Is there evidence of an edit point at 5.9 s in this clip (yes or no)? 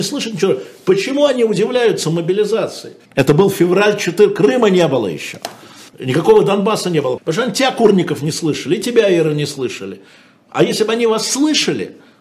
yes